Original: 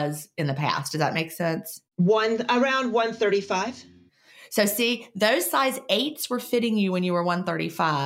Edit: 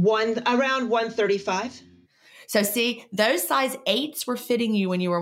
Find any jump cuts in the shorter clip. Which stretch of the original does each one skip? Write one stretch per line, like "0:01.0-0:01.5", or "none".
none